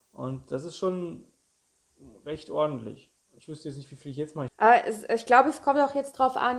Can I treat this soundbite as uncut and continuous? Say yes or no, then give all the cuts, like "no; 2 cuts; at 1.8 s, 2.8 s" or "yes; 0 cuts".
no; 1 cut; at 4.5 s